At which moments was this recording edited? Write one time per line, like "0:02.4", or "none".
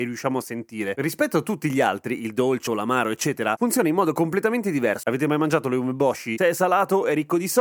0:02.7
0:05.0
0:06.4